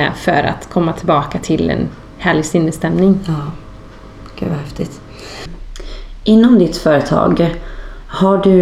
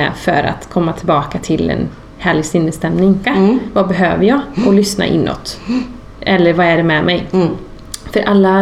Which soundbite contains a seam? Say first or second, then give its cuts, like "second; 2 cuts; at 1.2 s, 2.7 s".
second; 2 cuts; at 3.2 s, 6.1 s